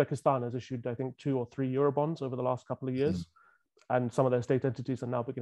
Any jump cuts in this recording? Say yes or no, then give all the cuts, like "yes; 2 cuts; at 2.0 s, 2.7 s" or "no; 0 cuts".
no; 0 cuts